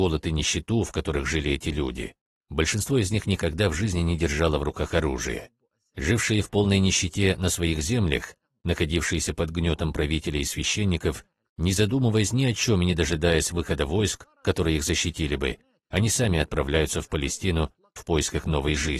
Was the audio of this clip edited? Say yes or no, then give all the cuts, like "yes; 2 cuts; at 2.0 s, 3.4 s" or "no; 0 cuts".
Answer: no; 0 cuts